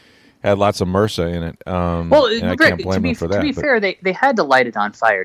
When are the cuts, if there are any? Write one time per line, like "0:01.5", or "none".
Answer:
none